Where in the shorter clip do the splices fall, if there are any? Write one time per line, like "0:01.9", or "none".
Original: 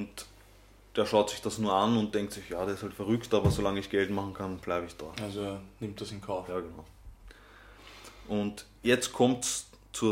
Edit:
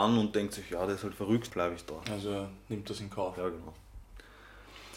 0:01.5